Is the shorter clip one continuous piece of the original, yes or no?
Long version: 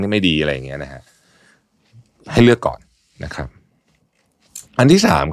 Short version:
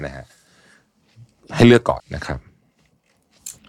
no